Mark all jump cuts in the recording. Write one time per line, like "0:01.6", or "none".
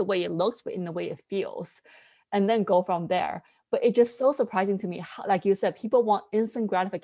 none